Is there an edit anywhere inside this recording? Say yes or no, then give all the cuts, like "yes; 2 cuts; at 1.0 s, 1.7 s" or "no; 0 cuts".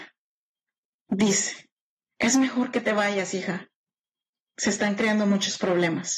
no; 0 cuts